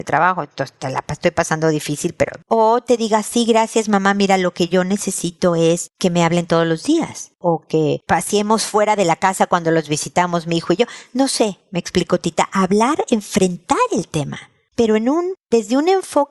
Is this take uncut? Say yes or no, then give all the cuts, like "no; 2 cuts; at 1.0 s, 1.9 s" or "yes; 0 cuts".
yes; 0 cuts